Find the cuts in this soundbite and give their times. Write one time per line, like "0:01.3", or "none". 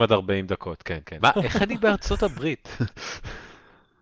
0:01.2